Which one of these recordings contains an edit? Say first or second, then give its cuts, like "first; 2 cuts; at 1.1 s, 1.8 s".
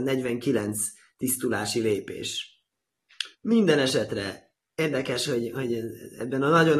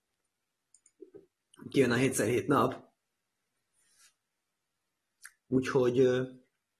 first; 1 cut; at 3.3 s